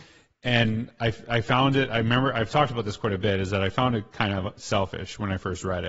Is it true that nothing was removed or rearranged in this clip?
yes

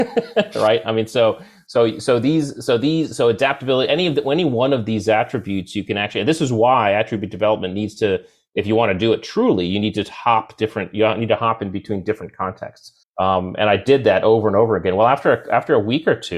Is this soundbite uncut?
no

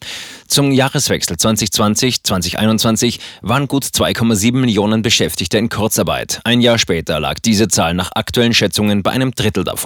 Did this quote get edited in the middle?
no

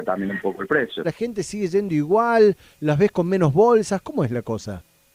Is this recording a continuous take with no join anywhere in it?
no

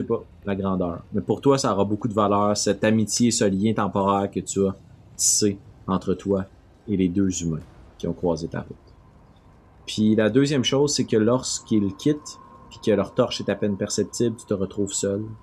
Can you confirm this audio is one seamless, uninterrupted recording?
yes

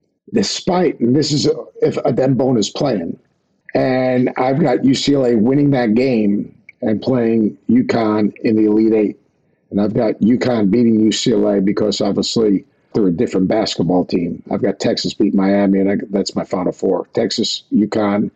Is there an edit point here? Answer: yes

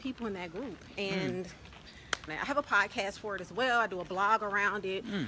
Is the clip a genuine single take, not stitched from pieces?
no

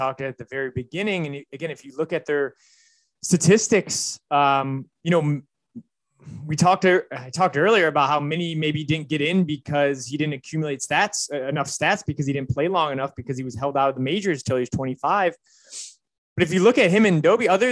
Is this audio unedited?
yes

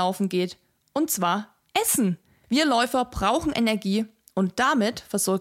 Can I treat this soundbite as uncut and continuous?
no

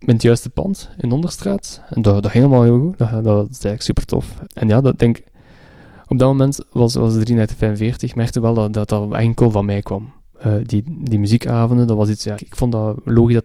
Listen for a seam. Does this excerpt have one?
yes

